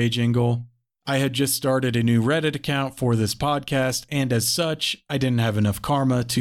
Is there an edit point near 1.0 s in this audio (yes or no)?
yes